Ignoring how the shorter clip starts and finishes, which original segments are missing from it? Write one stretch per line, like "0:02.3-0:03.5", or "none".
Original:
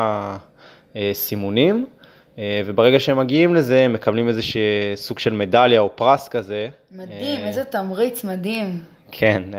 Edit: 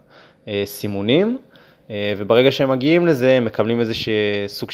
none